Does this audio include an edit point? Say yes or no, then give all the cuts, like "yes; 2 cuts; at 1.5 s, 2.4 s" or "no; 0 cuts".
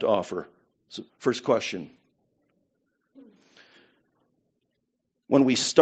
yes; 1 cut; at 1.1 s